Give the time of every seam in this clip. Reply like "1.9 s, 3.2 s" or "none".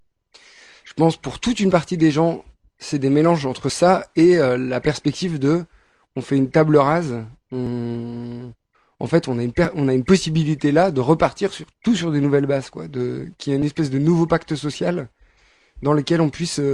none